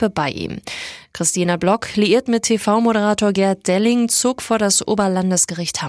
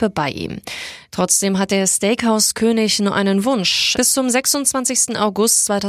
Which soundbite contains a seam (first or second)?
second